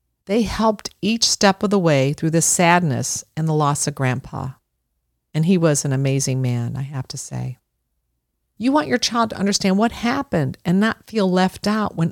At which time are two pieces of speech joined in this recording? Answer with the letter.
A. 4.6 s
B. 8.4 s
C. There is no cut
B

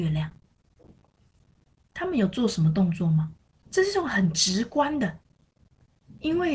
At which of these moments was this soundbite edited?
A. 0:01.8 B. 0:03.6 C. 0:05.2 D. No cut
B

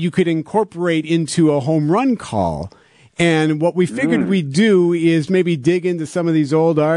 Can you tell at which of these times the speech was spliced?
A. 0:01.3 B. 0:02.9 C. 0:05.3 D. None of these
C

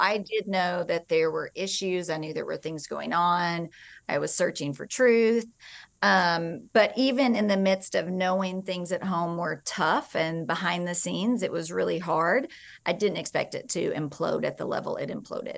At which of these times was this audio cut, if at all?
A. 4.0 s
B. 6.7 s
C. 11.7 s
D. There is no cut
B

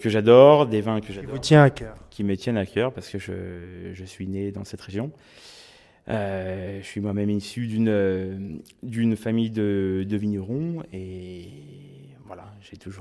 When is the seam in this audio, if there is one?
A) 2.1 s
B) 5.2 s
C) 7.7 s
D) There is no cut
D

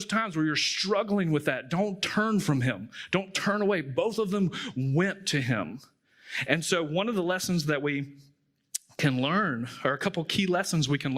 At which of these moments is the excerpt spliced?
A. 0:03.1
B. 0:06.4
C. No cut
B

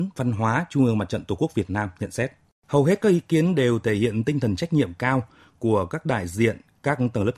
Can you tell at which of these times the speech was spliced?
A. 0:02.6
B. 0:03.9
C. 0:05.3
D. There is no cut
A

